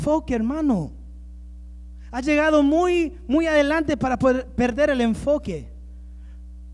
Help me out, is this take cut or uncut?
uncut